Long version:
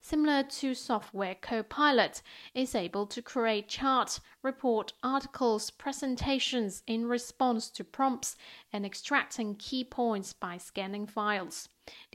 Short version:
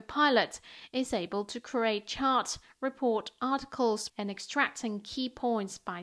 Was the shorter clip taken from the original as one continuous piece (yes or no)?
no